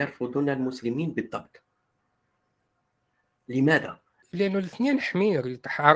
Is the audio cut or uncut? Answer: cut